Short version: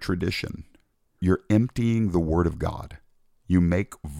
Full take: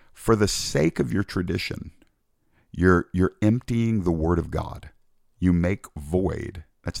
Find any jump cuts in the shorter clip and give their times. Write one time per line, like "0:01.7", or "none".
0:01.2